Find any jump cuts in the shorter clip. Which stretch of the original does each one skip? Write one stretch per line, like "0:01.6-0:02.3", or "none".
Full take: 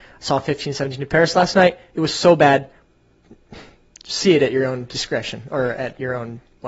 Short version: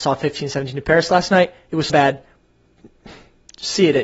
0:02.1-0:02.4